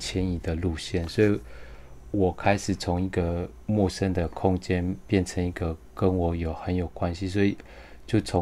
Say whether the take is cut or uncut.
uncut